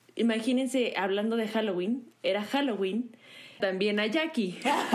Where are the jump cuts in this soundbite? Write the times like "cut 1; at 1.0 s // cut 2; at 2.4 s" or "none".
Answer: cut 1; at 3.6 s